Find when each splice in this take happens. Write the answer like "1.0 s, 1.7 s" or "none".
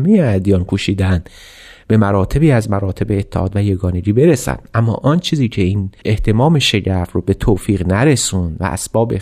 6.0 s